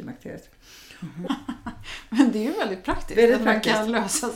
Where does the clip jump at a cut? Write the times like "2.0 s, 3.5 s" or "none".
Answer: 1.3 s